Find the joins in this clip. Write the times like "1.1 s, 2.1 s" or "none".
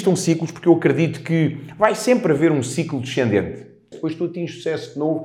3.9 s